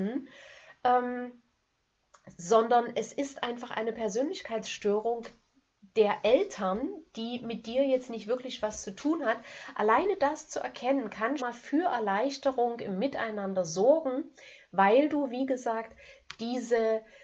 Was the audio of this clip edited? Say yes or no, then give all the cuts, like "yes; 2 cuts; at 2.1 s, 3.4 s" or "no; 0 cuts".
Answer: yes; 1 cut; at 11.4 s